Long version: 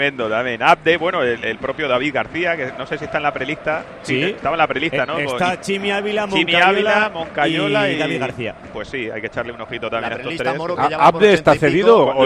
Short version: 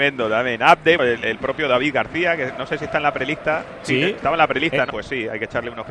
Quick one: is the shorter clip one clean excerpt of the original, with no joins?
no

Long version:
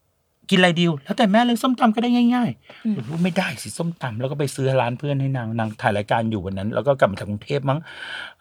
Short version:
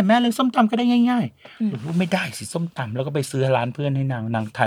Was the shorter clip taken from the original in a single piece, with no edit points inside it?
yes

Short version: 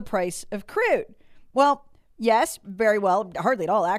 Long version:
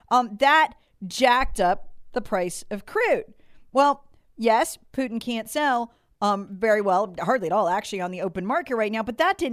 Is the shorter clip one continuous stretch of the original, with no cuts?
no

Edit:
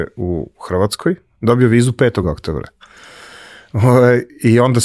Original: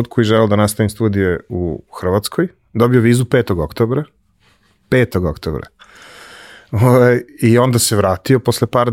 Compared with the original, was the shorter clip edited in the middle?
yes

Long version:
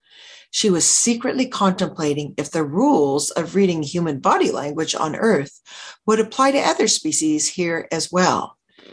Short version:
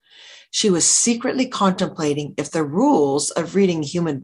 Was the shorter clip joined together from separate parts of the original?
no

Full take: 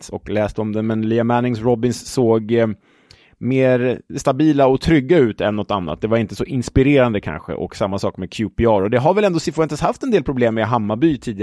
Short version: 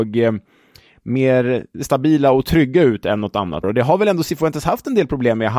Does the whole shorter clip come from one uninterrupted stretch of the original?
no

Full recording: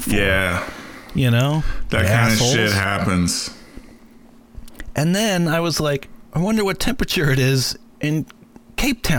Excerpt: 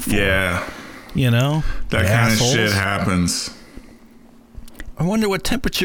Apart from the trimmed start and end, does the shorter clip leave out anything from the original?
yes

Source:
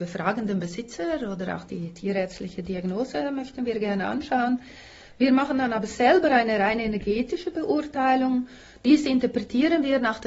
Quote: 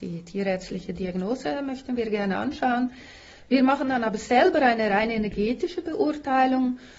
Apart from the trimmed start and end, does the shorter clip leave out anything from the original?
no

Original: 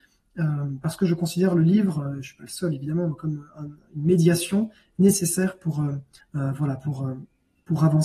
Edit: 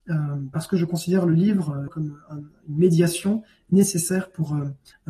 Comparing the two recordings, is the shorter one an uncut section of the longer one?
no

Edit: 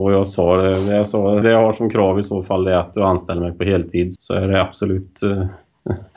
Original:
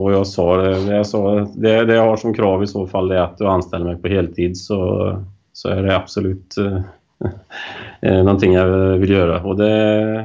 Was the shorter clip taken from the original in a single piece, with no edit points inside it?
no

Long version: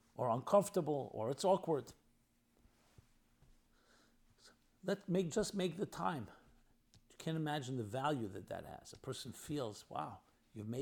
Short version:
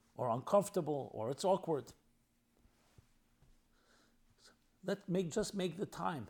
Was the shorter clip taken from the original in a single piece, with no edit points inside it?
yes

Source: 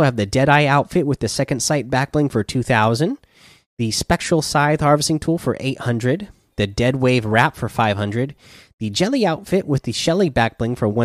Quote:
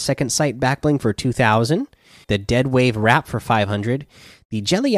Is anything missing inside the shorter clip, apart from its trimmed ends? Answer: yes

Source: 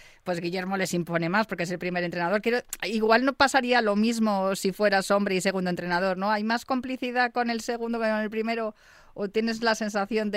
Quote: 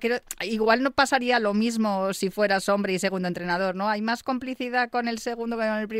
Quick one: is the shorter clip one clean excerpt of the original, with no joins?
yes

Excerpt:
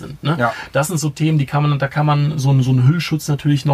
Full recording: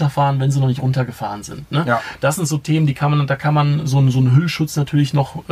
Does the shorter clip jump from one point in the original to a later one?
no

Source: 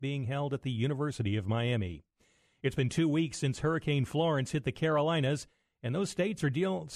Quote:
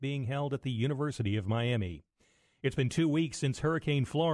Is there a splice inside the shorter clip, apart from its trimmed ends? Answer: no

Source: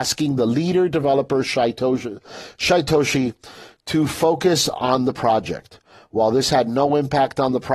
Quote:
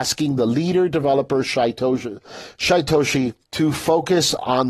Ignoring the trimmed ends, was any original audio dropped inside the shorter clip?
yes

